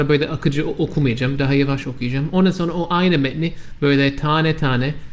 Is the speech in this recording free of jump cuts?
yes; 0 cuts

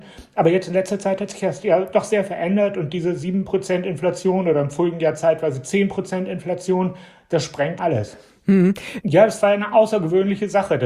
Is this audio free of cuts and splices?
no; 2 cuts; at 7.8 s, 9.0 s

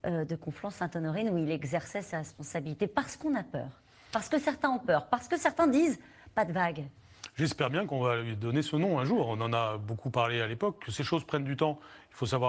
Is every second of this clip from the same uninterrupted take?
yes; 0 cuts

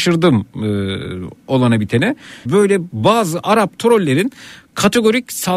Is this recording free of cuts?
no; 1 cut; at 2.5 s

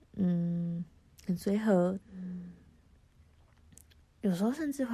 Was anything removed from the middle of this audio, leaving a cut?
yes; 1 cut; at 2.0 s

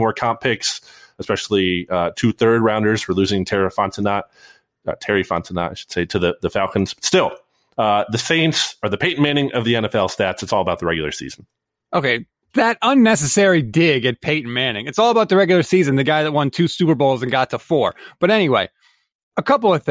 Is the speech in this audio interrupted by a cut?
no; 0 cuts

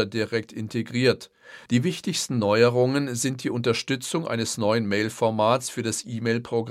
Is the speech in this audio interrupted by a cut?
yes; 1 cut; at 1.7 s

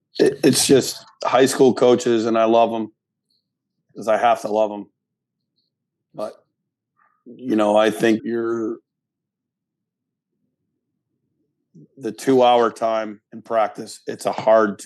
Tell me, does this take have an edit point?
yes; 2 cuts; at 8.2 s, 13.3 s

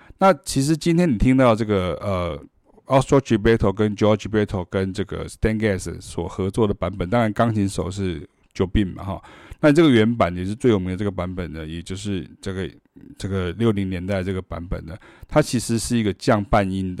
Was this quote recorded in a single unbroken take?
yes; 0 cuts

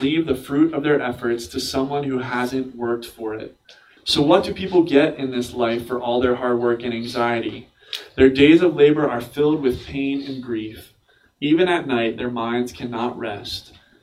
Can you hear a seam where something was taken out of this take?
yes; 1 cut; at 4.0 s

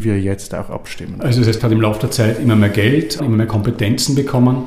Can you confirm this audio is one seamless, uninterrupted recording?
no; 2 cuts; at 1.6 s, 3.2 s

